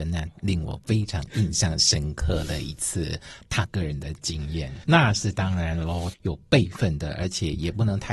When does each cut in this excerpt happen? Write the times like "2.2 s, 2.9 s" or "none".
4.8 s, 6.1 s